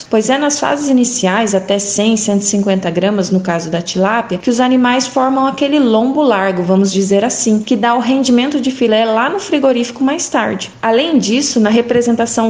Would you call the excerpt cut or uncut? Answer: uncut